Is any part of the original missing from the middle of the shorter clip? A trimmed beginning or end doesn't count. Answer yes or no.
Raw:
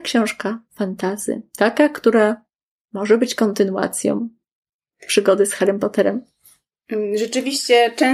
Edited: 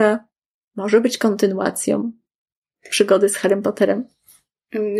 no